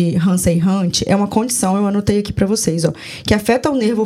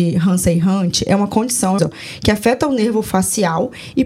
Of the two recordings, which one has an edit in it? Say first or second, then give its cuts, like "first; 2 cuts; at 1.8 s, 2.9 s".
second; 1 cut; at 1.8 s